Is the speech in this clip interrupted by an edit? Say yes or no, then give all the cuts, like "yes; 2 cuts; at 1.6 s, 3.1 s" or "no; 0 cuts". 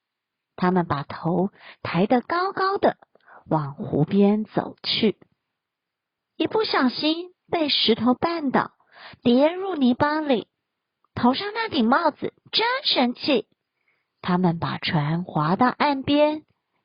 yes; 2 cuts; at 6.2 s, 11.1 s